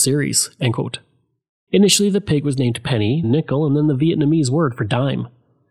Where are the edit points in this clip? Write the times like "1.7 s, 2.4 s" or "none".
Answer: 1.7 s, 3.2 s

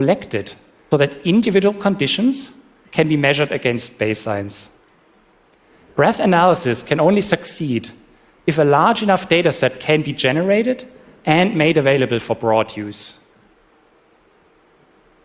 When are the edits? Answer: 0.9 s

